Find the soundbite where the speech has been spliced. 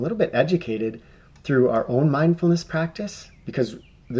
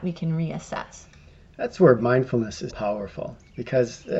second; 1 cut; at 2.7 s

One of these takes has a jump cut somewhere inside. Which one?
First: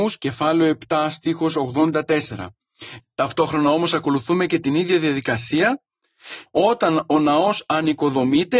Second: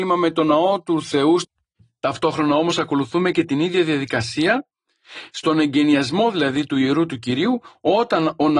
first; 2 cuts; at 3.0 s, 6.5 s

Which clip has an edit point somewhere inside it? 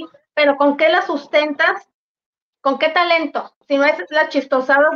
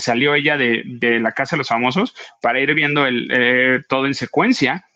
first; 1 cut; at 3.6 s

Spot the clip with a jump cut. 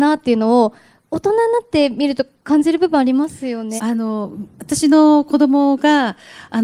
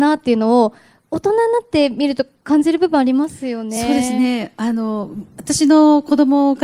first; 1 cut; at 3.8 s

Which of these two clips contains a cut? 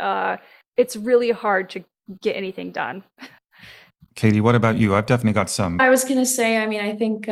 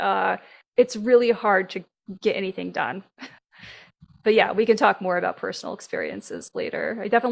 first; 2 cuts; at 4.1 s, 5.8 s

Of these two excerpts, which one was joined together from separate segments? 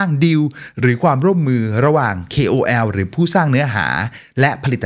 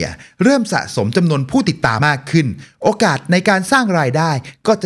second; 1 cut; at 2.0 s

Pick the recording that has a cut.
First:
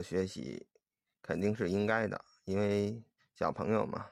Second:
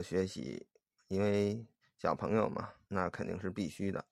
second; 2 cuts; at 1.0 s, 2.9 s

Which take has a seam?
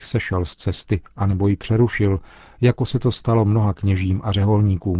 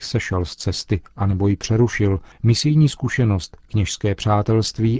second; 1 cut; at 2.3 s

